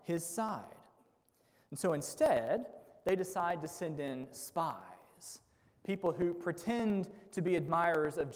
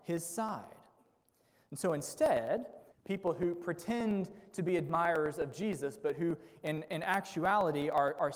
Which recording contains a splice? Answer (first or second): second